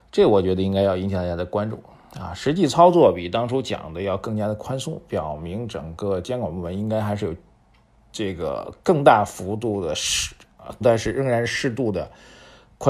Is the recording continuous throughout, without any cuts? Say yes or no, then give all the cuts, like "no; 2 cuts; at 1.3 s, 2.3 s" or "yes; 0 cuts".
no; 1 cut; at 10.8 s